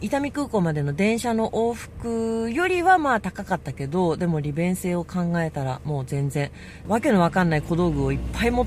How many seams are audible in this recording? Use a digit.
1